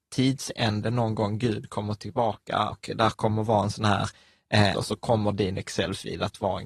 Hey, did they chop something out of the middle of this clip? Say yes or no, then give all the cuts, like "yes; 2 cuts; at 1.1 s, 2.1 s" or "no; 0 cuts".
yes; 2 cuts; at 2.7 s, 4.7 s